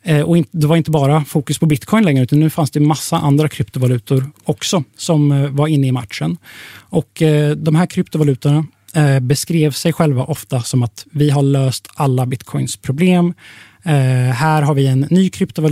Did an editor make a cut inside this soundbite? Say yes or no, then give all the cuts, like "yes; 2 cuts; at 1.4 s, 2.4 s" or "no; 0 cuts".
no; 0 cuts